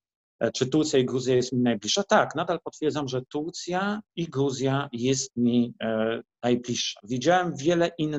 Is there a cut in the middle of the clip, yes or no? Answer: no